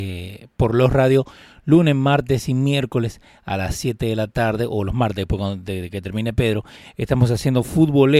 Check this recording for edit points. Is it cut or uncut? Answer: uncut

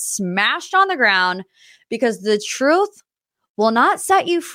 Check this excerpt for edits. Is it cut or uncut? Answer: uncut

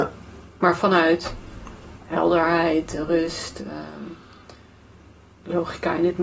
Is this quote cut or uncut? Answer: uncut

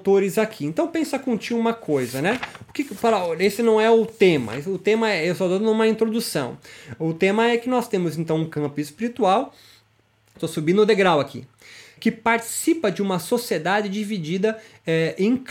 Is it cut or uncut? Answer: cut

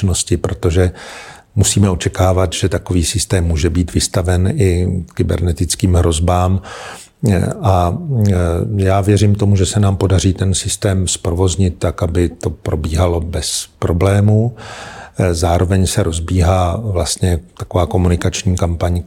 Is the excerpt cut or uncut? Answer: uncut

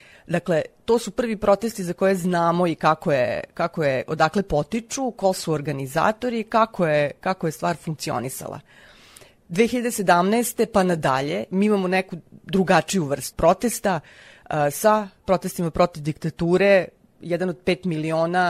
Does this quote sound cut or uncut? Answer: cut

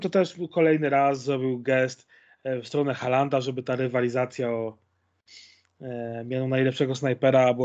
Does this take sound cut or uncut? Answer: uncut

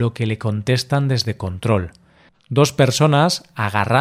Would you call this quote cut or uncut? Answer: cut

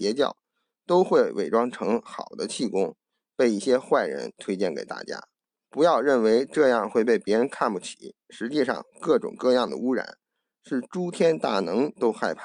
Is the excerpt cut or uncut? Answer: cut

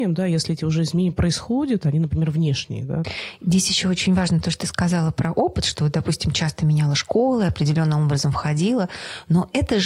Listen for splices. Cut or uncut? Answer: uncut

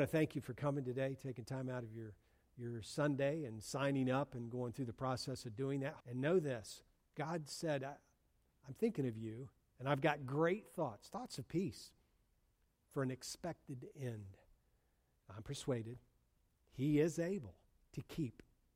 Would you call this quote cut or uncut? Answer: cut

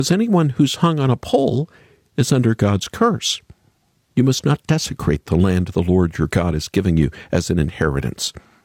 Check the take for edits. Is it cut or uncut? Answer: uncut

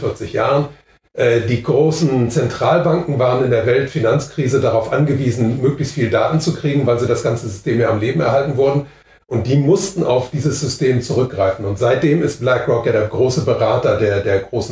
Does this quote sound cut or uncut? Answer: uncut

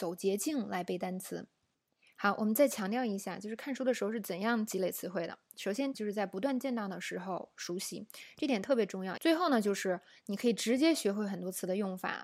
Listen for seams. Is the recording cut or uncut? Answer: cut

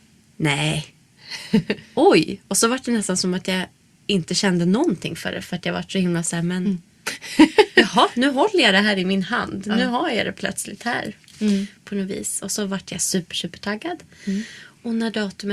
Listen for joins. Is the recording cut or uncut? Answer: uncut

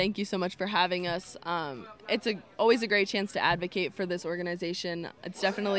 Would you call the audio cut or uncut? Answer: uncut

